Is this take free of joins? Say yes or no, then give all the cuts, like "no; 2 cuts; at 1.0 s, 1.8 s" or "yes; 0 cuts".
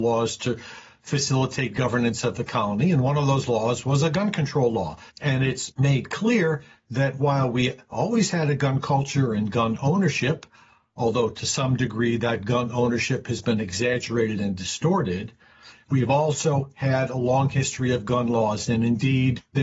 no; 1 cut; at 5.1 s